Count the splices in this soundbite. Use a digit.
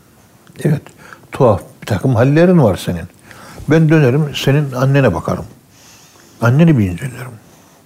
0